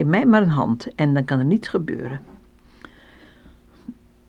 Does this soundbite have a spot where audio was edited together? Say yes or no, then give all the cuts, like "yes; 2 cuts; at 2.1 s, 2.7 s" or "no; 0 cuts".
no; 0 cuts